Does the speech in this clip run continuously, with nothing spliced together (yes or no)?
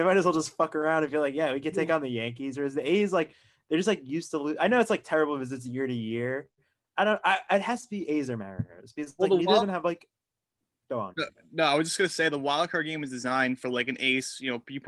yes